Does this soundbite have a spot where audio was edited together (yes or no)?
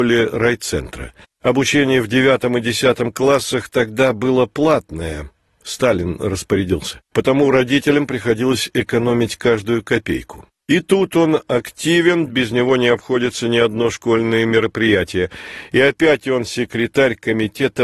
yes